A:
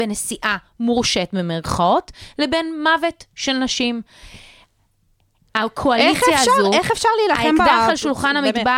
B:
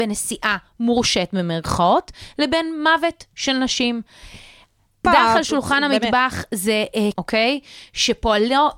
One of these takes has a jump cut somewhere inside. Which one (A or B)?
B